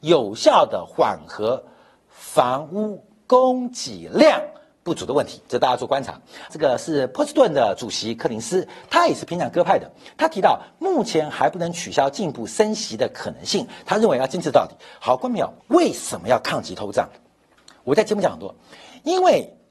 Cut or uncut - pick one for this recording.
cut